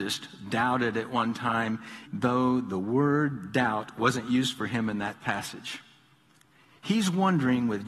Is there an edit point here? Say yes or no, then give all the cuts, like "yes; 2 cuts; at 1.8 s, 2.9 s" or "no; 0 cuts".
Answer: yes; 1 cut; at 2.1 s